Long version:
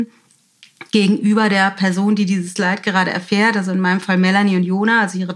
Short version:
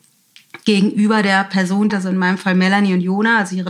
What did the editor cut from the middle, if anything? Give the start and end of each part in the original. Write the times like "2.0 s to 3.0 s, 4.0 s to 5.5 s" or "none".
2.2 s to 3.5 s